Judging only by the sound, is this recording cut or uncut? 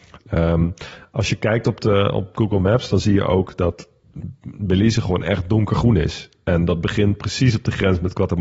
uncut